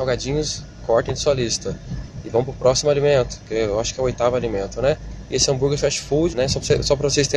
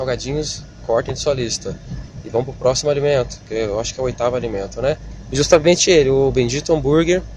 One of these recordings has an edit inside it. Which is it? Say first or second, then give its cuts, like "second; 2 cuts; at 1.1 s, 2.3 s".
first; 2 cuts; at 5.2 s, 6.3 s